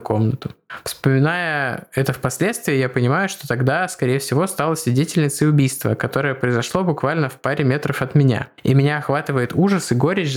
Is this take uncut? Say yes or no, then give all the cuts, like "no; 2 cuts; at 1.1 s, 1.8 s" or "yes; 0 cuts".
yes; 0 cuts